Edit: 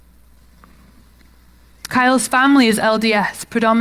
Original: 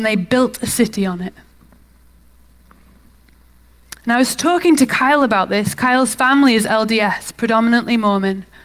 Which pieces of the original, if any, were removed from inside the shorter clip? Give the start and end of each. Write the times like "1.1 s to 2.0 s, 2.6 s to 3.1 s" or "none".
4.0 s to 5.8 s